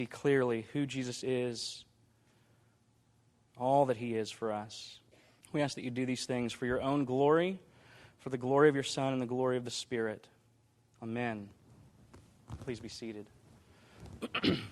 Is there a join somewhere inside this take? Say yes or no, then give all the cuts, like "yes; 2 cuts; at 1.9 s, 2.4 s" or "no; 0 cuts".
yes; 1 cut; at 5.4 s